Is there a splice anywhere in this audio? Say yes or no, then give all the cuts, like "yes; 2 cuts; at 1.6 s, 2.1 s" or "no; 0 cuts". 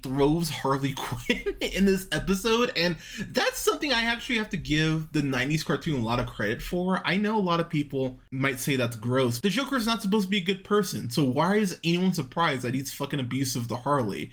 yes; 1 cut; at 9.4 s